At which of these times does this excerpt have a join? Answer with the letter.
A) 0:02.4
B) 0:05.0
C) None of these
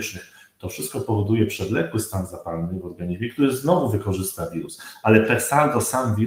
C